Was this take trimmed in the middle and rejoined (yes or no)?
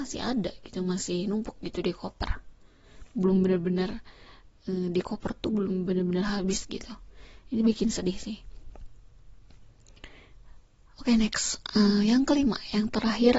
no